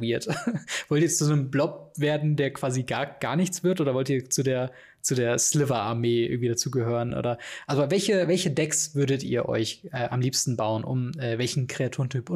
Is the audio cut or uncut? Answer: uncut